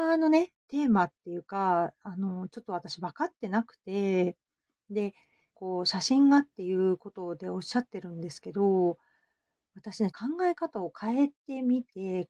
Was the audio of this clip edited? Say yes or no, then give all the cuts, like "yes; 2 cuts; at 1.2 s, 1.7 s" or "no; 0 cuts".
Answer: yes; 2 cuts; at 5.5 s, 10.1 s